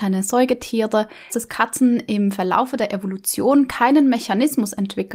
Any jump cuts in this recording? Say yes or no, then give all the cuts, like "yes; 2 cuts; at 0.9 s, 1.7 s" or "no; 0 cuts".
yes; 1 cut; at 1.3 s